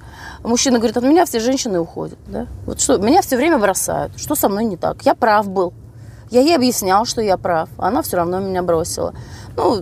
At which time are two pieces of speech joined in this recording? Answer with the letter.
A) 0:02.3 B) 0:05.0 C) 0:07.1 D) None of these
A